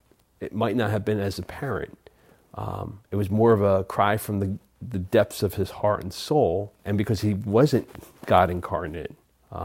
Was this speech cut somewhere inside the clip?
yes; 1 cut; at 6.8 s

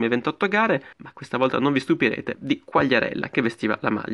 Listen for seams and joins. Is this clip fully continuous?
no; 2 cuts; at 0.9 s, 2.4 s

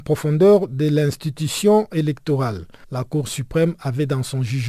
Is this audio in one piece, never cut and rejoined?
yes; 0 cuts

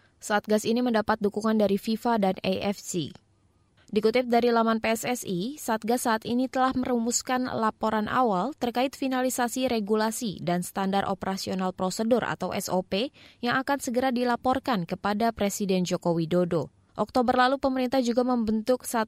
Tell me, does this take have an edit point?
yes; 1 cut; at 16.9 s

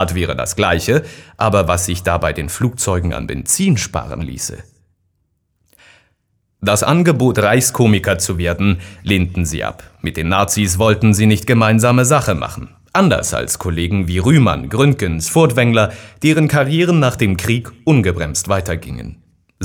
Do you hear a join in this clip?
no; 0 cuts

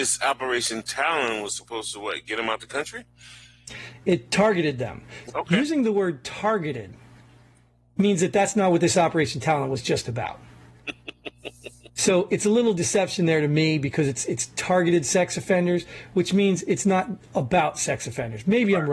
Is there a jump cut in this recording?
yes; 1 cut; at 5.3 s

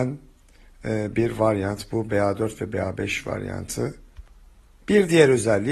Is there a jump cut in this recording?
no; 0 cuts

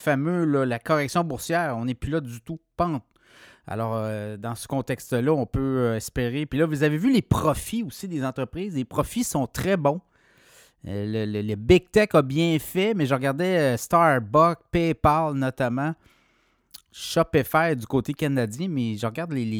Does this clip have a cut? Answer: no; 0 cuts

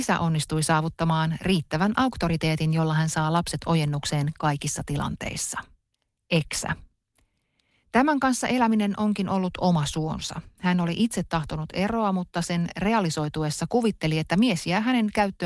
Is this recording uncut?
yes; 0 cuts

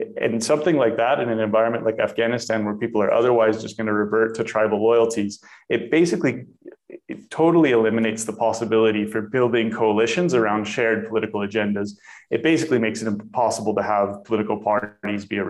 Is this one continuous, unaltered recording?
yes; 0 cuts

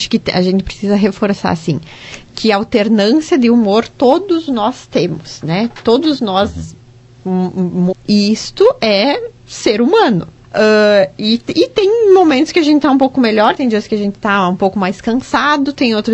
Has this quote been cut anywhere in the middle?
yes; 3 cuts; at 7.9 s, 10.4 s, 13.6 s

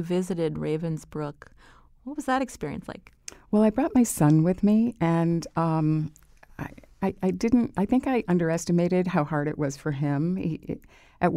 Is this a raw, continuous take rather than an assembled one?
yes; 0 cuts

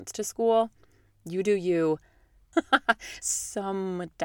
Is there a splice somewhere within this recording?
yes; 1 cut; at 2.5 s

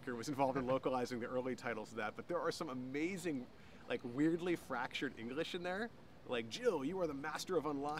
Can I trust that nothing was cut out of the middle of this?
yes; 0 cuts

